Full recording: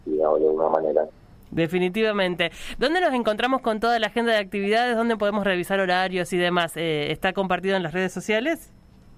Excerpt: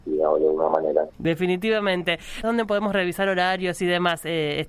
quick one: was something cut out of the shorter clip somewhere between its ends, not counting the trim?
yes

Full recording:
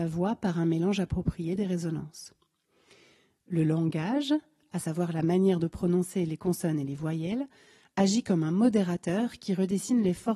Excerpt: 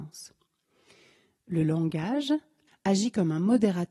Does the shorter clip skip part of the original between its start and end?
yes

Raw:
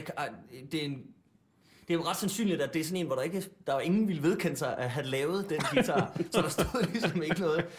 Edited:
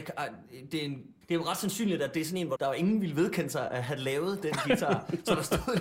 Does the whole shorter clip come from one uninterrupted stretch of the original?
no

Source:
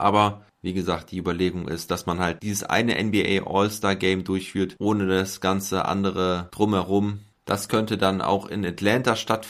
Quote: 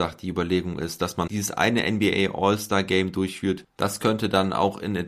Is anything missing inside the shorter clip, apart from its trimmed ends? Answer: yes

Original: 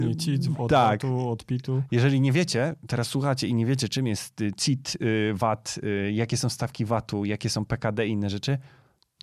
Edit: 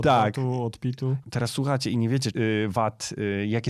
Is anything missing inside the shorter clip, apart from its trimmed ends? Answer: yes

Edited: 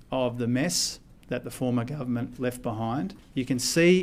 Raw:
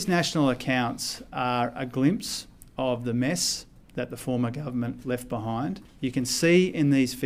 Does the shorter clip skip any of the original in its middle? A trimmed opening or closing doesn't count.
no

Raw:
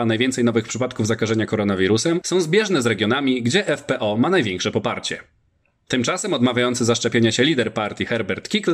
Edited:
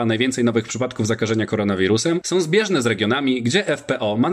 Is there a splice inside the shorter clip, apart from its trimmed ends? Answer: no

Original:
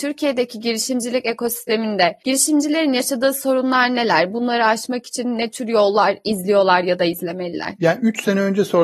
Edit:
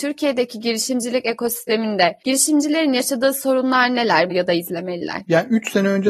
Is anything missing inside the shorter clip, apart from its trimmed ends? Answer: yes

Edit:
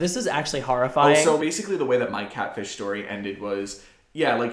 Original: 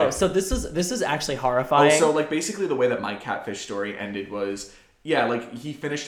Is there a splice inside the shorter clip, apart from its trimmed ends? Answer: yes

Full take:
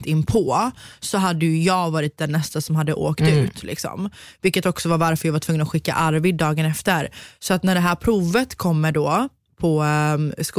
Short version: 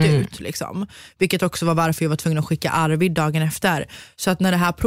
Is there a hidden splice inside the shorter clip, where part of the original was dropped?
no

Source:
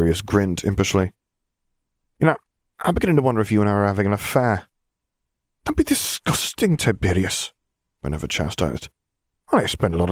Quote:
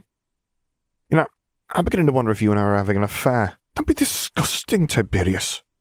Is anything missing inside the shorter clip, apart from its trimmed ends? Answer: yes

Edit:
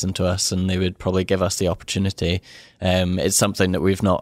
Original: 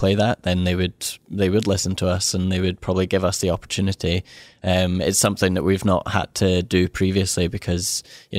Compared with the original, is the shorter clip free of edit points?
yes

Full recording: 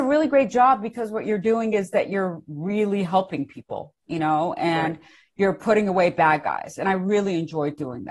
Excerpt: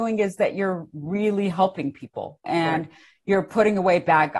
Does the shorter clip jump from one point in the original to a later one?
yes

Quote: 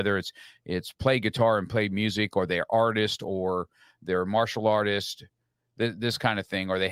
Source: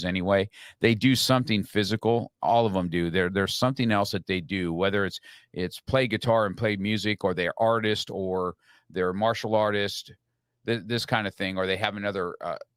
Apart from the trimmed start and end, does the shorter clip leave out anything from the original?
no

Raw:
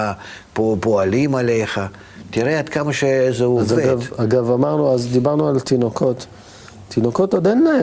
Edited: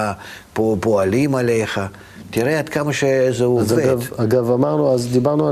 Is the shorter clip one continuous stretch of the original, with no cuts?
yes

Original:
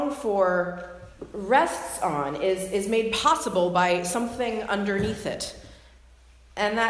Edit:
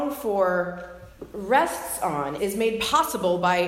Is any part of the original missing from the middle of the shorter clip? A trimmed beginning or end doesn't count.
yes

